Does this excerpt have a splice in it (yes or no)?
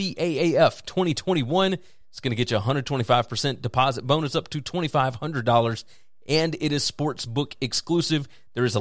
no